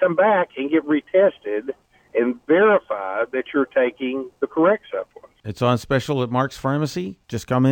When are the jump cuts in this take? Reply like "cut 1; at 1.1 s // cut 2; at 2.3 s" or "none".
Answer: none